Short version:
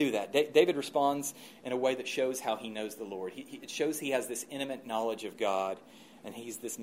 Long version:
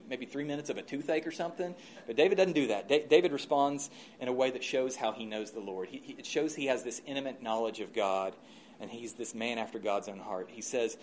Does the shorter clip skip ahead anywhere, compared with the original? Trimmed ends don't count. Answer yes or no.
no